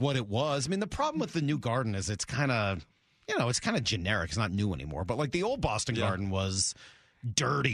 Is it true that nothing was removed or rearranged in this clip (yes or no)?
yes